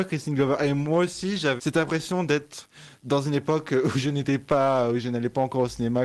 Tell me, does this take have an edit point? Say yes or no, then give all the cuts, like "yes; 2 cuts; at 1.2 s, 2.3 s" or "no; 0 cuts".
yes; 1 cut; at 1.6 s